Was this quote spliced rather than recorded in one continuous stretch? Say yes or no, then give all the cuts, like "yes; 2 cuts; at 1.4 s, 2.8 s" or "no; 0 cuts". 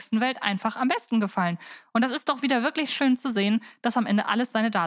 no; 0 cuts